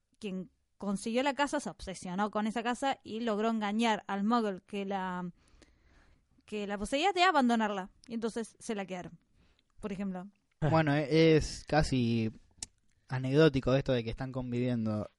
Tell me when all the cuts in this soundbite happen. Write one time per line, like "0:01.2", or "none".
0:10.6